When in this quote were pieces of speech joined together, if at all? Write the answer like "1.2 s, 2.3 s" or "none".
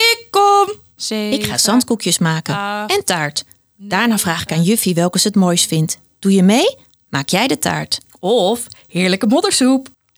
1.0 s